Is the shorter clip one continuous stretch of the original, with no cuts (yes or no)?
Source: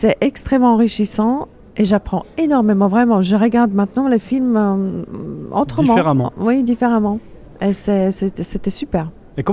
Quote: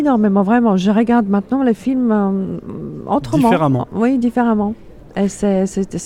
yes